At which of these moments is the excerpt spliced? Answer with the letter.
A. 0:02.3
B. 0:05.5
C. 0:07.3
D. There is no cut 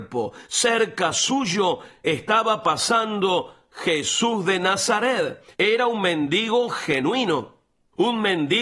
B